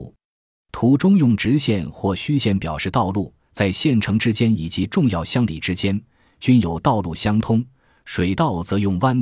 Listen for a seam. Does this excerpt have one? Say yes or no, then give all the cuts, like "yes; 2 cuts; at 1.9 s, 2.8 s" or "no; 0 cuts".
yes; 1 cut; at 3.4 s